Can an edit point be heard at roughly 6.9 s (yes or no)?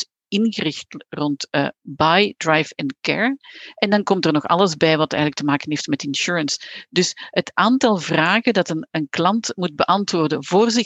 no